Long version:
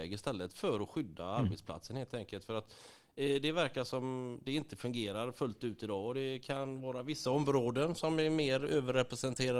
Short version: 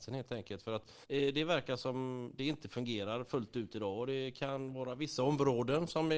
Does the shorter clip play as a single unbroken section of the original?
no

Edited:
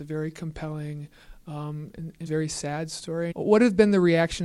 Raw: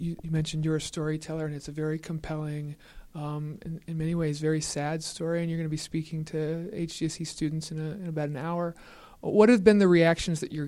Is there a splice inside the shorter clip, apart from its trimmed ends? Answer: yes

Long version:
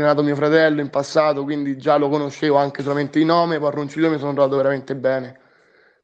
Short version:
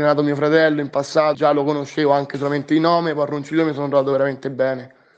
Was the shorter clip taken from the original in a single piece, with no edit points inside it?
no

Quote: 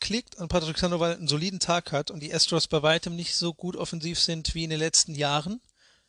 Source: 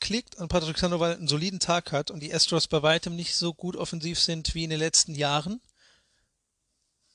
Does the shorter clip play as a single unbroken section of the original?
yes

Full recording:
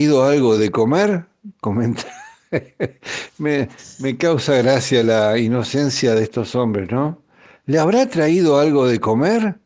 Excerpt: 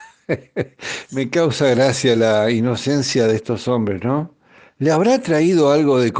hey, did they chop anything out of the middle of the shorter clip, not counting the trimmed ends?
yes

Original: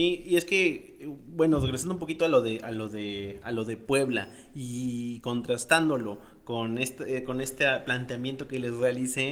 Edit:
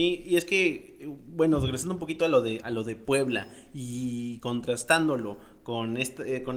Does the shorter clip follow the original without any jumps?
no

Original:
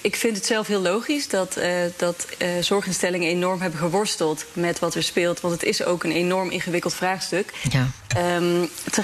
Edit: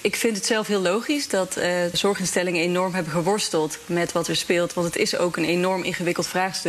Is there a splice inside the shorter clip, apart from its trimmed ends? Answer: yes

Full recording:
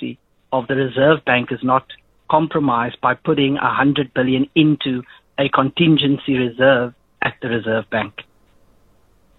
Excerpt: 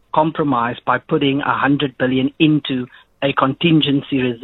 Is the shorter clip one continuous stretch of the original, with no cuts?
yes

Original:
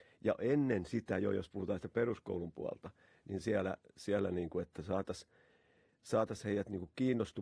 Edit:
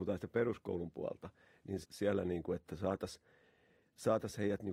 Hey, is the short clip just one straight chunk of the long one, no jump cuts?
no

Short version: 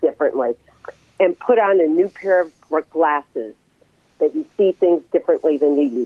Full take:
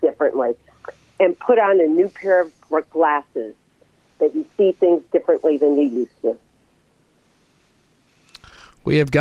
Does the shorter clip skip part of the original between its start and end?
no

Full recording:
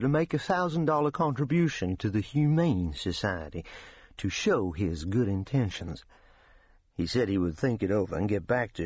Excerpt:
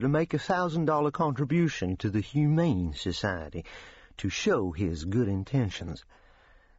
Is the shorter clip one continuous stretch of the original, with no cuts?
yes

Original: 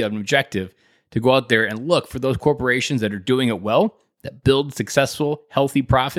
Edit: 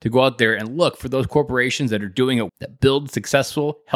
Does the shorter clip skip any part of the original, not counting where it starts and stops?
yes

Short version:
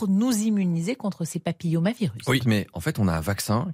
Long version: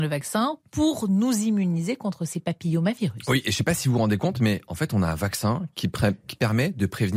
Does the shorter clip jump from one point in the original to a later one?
yes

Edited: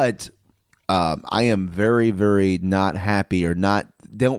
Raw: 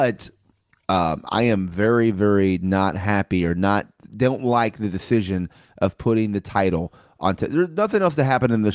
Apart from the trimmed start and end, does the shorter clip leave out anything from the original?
no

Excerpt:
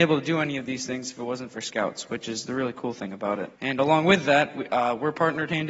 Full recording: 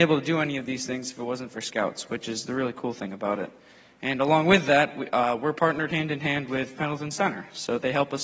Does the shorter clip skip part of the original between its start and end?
yes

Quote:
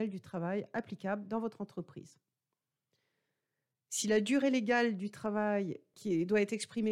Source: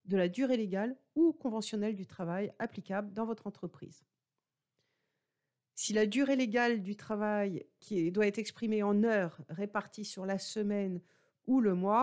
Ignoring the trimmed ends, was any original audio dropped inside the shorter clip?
no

